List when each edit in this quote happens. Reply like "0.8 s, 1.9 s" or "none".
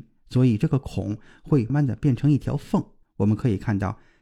1.7 s, 3.0 s